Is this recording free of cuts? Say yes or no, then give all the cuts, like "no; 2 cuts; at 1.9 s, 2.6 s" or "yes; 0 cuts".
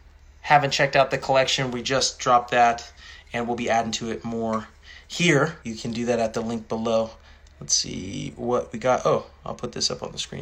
no; 1 cut; at 5.6 s